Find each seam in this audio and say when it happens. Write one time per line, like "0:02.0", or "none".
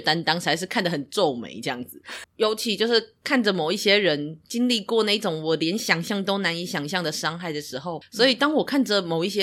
0:02.2
0:08.0